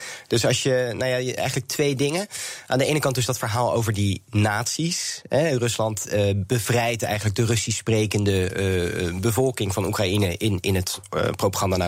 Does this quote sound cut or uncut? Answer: uncut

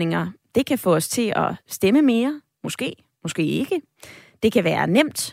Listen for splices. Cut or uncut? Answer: uncut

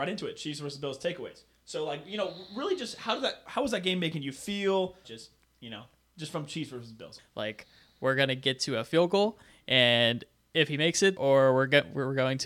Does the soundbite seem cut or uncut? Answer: cut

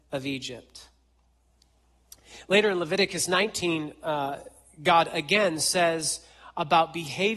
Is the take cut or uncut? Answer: uncut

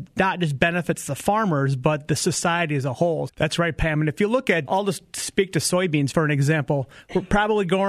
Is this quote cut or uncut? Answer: cut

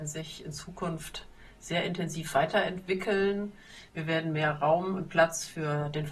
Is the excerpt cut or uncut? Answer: uncut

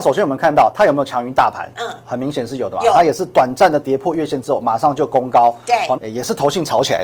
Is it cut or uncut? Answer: cut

